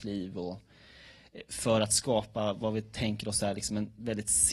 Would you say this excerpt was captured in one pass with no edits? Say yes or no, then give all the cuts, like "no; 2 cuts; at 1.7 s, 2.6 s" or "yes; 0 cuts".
yes; 0 cuts